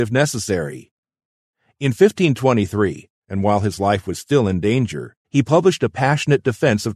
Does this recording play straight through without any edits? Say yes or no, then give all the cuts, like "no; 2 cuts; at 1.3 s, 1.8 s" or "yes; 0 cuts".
no; 2 cuts; at 3.2 s, 5.2 s